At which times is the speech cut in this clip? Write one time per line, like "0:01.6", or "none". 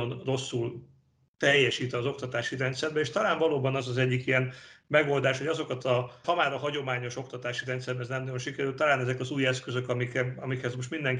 0:06.2